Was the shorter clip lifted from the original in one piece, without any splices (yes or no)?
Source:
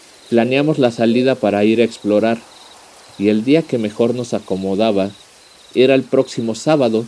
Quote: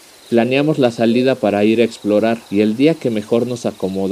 no